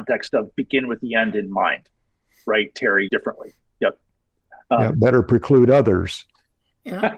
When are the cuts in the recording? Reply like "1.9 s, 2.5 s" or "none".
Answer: 3.1 s, 4.9 s